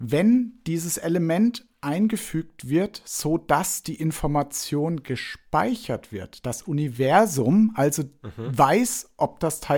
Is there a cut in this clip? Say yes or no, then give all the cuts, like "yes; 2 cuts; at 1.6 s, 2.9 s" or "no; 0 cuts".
no; 0 cuts